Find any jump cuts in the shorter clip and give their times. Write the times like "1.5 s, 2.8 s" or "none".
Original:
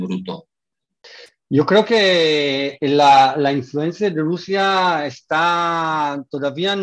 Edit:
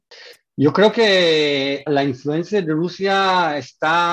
1.9 s